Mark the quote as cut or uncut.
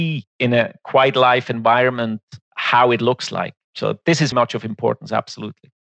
cut